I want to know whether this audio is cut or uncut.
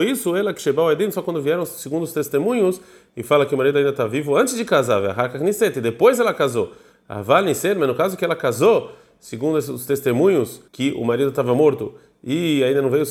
cut